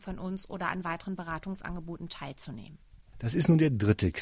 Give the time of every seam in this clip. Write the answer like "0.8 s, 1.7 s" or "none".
3.1 s

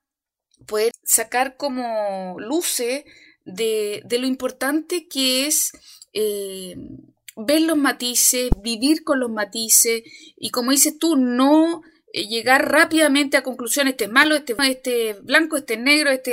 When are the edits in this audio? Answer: 0.9 s, 14.6 s

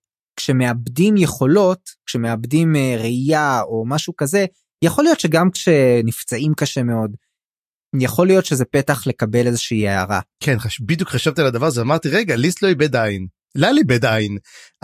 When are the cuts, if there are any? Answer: 10.3 s

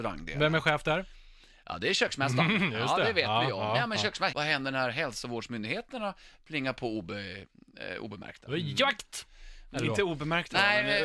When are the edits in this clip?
4.3 s

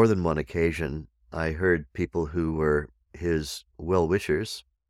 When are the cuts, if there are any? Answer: 3.7 s

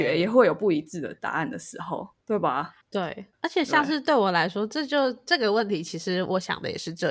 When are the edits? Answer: none

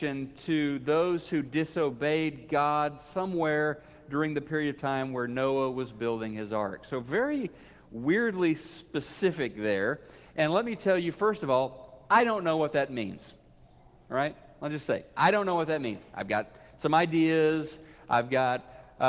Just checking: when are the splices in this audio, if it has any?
none

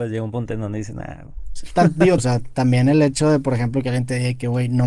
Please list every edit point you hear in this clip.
2.2 s

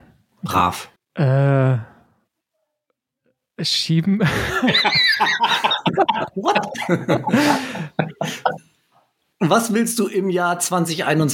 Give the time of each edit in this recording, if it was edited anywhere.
1.0 s, 8.6 s

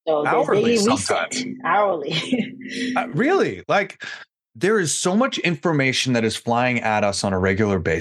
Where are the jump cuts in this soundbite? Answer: none

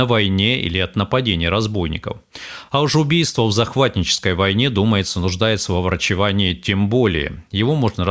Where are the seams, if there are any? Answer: none

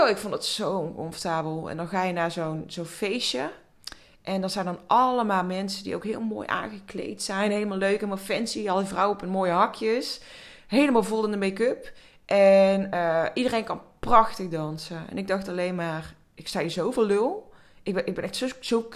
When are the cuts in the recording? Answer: none

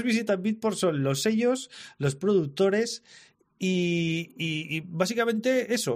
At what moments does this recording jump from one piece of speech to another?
none

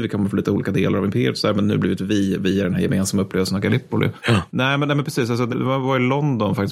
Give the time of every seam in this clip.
4.5 s, 5.5 s

